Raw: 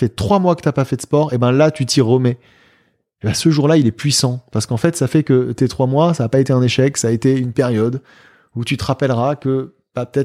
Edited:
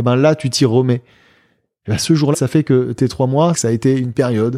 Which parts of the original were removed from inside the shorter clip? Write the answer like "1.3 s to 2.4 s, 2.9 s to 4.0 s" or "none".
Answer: 3.7 s to 4.9 s, 6.1 s to 6.9 s